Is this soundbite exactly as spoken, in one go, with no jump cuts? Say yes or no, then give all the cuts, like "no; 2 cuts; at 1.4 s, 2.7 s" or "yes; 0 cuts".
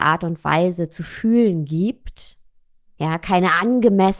yes; 0 cuts